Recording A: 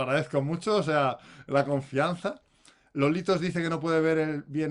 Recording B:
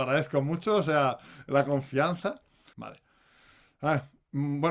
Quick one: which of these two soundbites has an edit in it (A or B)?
B